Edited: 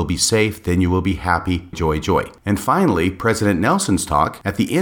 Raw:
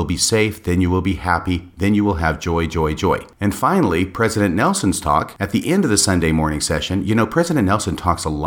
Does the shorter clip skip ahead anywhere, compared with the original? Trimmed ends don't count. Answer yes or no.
yes